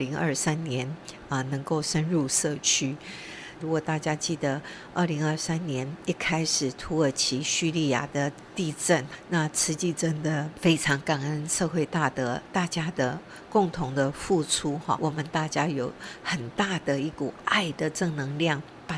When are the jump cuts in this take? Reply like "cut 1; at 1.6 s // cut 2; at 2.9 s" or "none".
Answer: cut 1; at 3.6 s